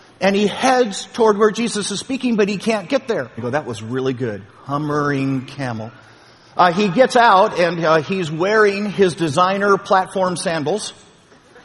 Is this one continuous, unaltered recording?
no; 1 cut; at 3.4 s

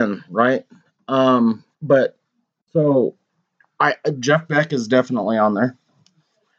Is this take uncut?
no; 1 cut; at 1.7 s

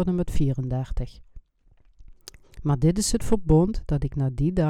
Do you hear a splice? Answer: yes; 1 cut; at 2.4 s

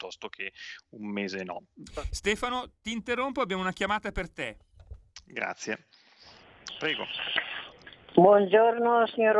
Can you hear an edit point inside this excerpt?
no; 0 cuts

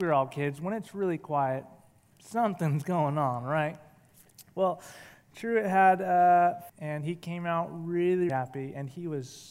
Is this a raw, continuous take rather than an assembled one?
no; 2 cuts; at 6.7 s, 8.3 s

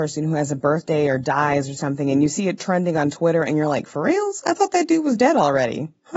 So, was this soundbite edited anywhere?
no; 0 cuts

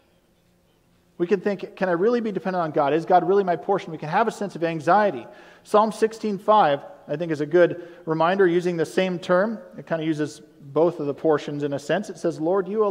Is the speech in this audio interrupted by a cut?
no; 0 cuts

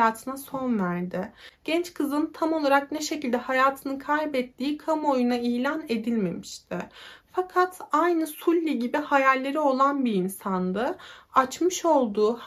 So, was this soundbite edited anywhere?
no; 0 cuts

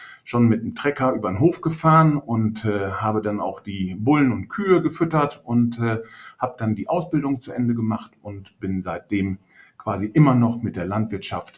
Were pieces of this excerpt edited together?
no; 0 cuts

